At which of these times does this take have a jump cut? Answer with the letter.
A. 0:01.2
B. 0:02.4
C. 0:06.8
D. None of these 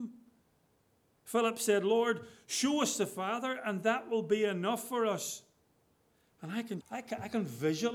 C